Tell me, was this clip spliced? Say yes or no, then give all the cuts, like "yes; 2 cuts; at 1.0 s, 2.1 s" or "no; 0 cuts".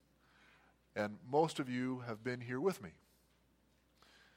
no; 0 cuts